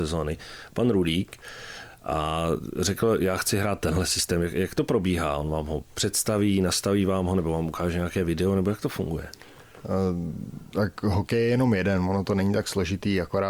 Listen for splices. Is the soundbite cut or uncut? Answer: uncut